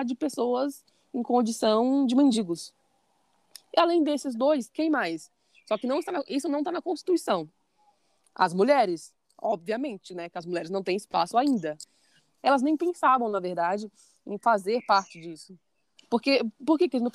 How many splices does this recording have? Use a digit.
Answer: 2